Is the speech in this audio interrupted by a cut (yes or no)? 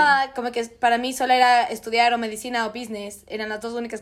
no